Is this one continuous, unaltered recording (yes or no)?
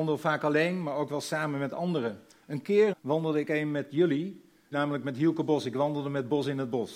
no